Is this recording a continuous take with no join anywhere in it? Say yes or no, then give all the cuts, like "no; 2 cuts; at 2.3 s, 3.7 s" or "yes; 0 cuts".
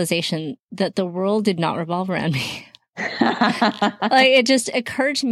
yes; 0 cuts